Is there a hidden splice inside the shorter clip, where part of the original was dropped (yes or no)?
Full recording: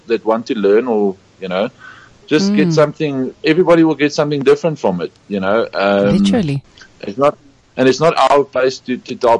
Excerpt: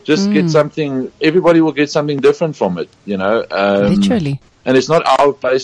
yes